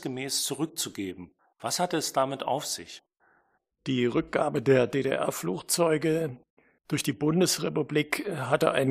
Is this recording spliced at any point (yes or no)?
no